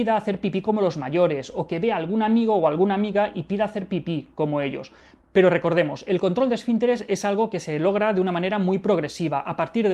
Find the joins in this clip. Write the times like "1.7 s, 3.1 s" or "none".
none